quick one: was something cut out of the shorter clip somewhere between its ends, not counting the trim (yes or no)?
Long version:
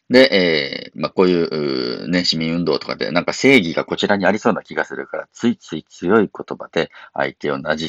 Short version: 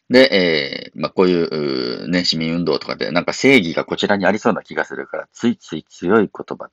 no